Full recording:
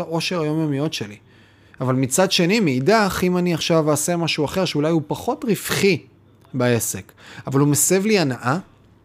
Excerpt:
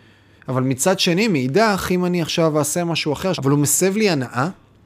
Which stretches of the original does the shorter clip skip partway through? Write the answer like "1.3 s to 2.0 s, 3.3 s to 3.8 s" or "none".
4.7 s to 7.4 s